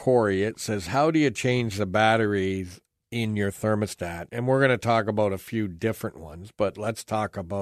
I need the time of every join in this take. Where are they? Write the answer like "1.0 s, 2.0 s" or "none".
4.3 s